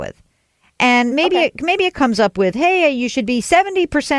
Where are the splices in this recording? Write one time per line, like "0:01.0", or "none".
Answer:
none